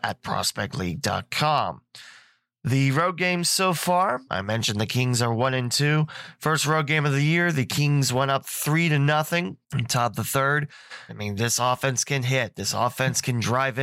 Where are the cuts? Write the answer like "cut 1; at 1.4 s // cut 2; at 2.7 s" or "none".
cut 1; at 4.3 s // cut 2; at 9.6 s // cut 3; at 11.1 s